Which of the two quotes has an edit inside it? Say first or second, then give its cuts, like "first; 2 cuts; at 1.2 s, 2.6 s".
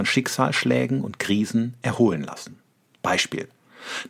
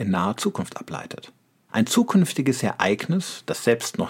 second; 1 cut; at 1.7 s